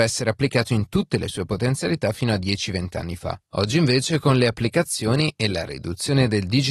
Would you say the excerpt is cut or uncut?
uncut